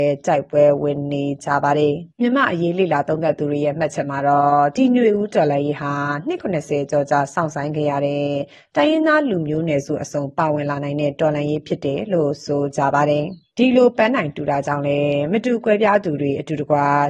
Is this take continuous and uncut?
no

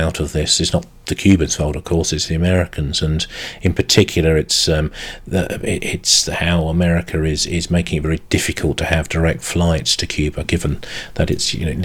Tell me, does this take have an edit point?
no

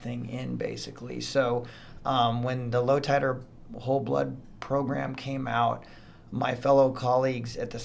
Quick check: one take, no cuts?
yes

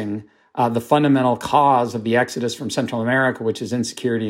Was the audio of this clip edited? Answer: no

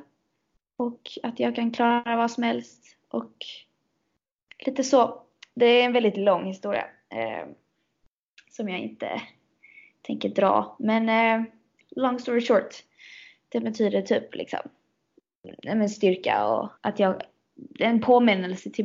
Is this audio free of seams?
no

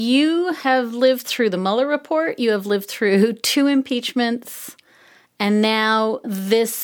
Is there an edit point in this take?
no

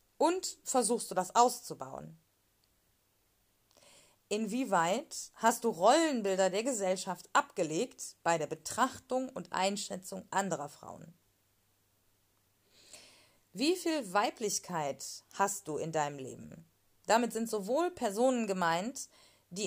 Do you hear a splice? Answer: yes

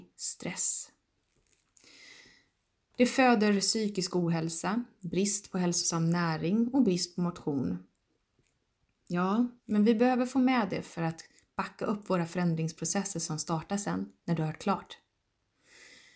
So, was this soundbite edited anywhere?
yes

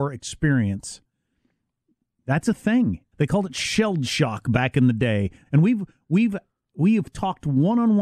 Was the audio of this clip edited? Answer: yes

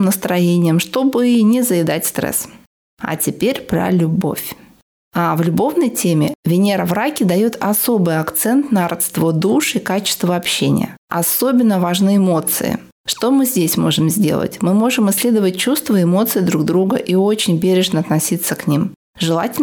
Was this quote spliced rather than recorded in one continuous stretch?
no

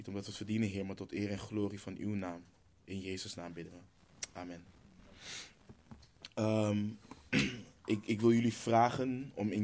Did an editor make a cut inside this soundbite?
no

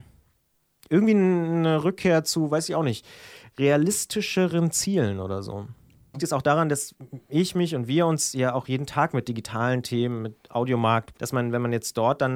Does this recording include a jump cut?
yes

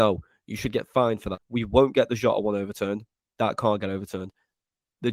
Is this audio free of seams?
no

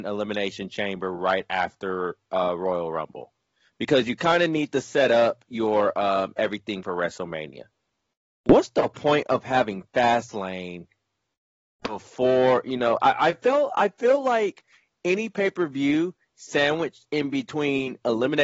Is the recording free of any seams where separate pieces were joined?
yes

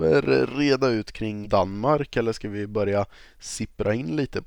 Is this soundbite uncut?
no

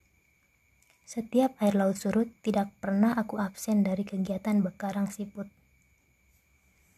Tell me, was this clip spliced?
no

